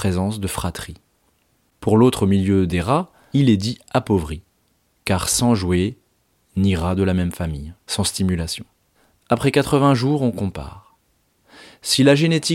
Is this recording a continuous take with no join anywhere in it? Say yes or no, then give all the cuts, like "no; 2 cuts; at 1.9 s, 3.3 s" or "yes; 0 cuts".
no; 1 cut; at 7.8 s